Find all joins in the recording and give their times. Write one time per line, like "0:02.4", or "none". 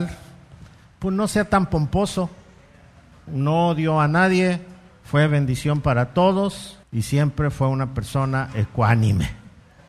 0:03.3
0:06.8